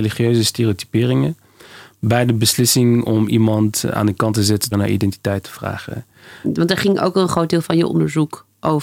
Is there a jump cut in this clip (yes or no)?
yes